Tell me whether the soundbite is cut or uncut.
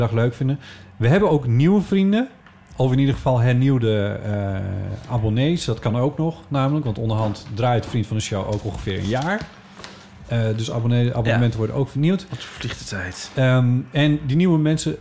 uncut